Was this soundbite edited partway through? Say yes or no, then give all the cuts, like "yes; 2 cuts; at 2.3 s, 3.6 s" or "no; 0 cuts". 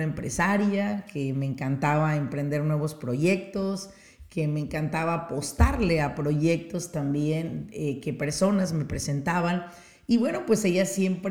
no; 0 cuts